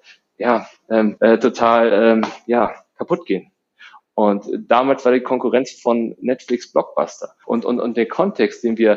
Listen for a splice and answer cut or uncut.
cut